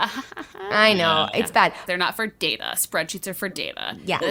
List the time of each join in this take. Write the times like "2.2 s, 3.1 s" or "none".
1.9 s